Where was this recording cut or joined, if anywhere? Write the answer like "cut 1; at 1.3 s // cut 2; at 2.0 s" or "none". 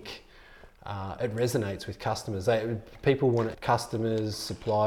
cut 1; at 3.5 s